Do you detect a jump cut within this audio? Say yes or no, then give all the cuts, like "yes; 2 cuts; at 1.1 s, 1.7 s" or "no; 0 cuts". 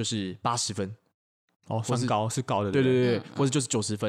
no; 0 cuts